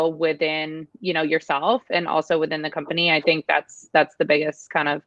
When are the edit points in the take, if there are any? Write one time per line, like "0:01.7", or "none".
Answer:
none